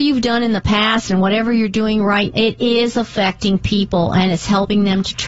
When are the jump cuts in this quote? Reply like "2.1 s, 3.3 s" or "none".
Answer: 2.3 s